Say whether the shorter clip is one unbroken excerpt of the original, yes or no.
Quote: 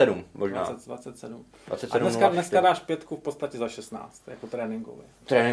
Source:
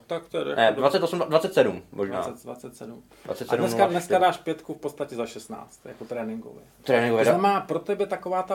yes